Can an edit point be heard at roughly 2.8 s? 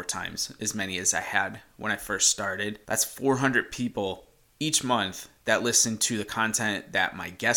yes; 1 cut; at 2.8 s

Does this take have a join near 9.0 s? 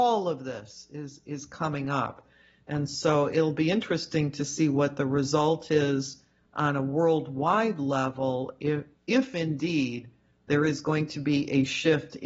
yes; 1 cut; at 9.0 s

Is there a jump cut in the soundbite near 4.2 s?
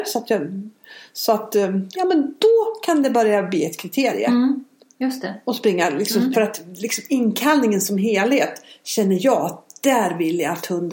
no; 2 cuts; at 2.0 s, 6.3 s

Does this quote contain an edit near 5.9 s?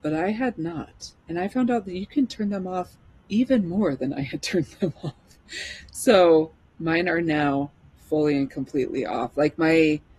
no; 1 cut; at 1.2 s

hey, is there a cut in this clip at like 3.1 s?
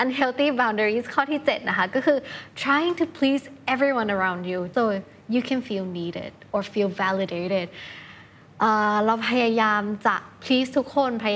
no; 1 cut; at 4.7 s

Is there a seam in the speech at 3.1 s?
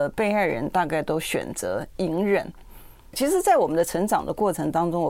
yes; 1 cut; at 3.1 s

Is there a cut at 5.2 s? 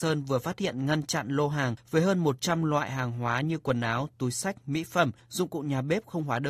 yes; 1 cut; at 5.2 s

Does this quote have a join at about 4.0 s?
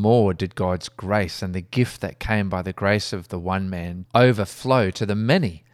yes; 1 cut; at 4.0 s

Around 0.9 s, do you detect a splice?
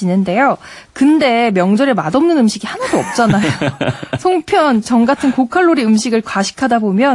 no; 1 cut; at 4.8 s

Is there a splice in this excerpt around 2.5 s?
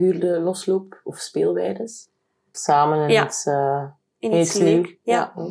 yes; 1 cut; at 2.5 s

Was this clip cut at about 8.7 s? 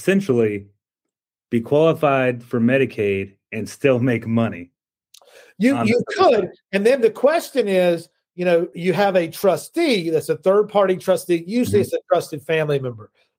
yes; 1 cut; at 8.7 s

